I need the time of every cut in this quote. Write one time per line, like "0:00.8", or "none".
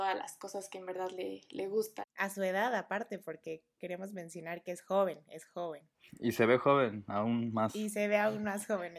none